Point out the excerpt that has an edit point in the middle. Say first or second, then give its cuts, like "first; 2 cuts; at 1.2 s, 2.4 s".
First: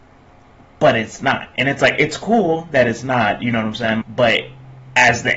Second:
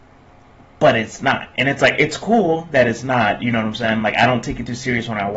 first; 1 cut; at 4.0 s